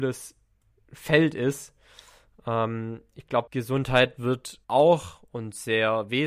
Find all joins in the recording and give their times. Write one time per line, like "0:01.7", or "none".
0:03.5
0:04.6

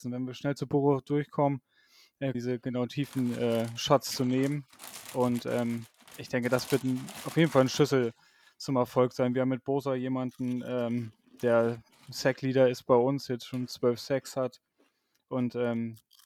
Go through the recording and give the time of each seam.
0:02.3

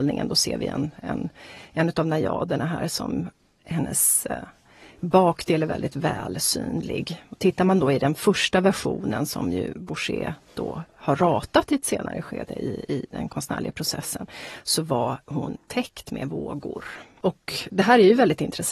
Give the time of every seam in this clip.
0:17.7

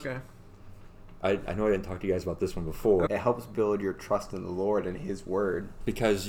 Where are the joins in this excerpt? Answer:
0:03.1

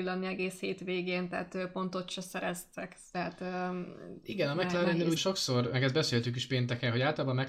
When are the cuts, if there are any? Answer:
0:05.2

